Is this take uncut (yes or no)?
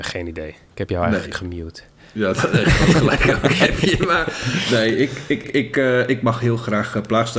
no